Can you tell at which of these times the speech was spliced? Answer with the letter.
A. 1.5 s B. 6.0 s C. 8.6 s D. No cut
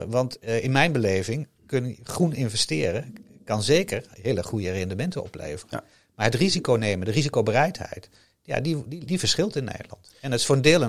A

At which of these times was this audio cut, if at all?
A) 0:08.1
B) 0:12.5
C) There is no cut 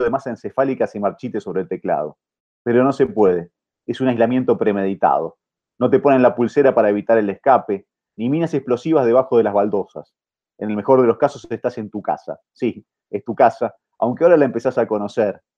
A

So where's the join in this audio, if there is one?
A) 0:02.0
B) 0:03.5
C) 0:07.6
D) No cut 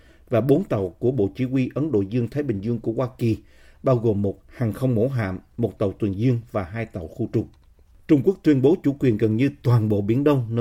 D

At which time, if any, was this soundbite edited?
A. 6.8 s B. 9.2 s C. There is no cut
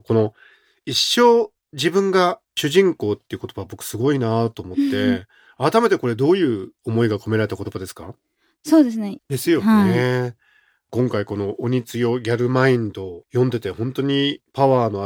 B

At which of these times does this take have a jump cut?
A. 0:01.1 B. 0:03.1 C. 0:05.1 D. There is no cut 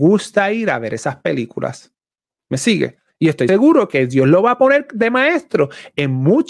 B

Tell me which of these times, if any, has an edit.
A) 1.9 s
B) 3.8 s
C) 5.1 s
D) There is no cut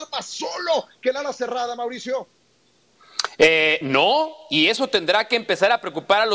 D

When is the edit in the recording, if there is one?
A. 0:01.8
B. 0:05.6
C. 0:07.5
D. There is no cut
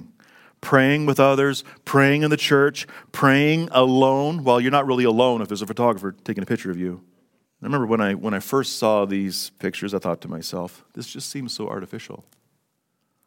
C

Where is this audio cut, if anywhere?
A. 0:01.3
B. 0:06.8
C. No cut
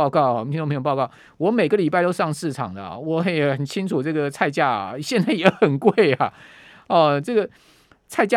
C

